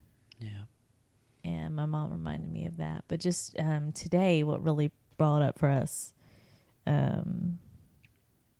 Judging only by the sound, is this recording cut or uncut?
uncut